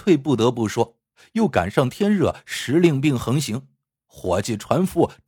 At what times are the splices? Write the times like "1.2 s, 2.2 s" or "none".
none